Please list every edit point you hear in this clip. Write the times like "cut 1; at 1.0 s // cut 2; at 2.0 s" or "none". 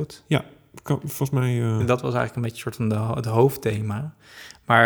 cut 1; at 1.8 s